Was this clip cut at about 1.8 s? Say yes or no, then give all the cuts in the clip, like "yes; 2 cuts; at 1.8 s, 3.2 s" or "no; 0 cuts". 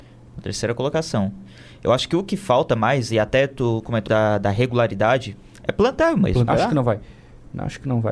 no; 2 cuts; at 4.1 s, 6.5 s